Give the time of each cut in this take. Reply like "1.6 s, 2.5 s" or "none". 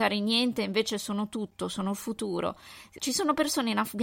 3.0 s